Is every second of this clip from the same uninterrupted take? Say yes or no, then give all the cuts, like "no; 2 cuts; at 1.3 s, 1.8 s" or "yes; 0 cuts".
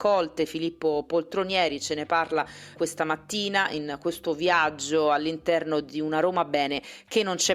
no; 1 cut; at 2.7 s